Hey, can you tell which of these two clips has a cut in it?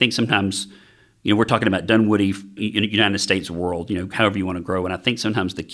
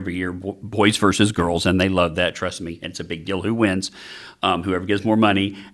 first; 1 cut; at 2.6 s

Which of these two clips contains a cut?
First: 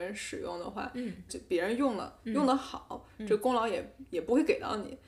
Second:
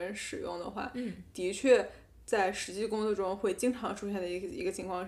first; 1 cut; at 1.3 s

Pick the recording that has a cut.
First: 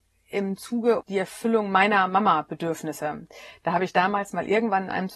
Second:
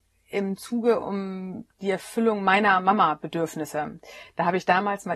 first; 1 cut; at 1.0 s

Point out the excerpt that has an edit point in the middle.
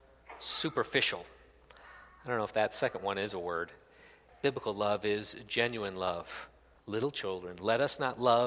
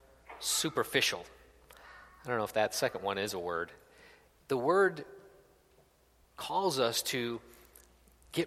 first; 2 cuts; at 4.3 s, 6.8 s

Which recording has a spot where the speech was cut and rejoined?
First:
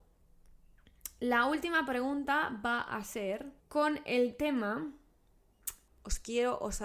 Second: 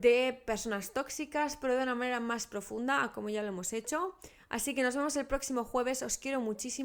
first; 2 cuts; at 3.6 s, 5.9 s

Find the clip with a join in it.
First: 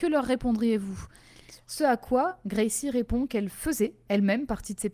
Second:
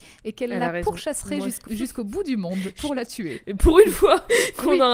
second; 2 cuts; at 1.7 s, 3.4 s

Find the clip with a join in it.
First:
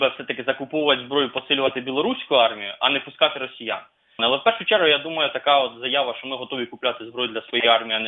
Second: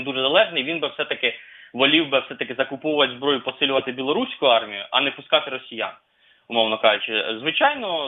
first; 1 cut; at 4.2 s

